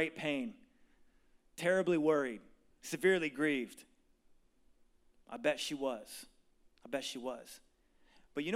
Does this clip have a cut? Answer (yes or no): yes